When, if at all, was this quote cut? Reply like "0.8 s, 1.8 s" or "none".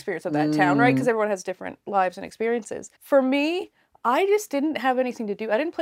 2.9 s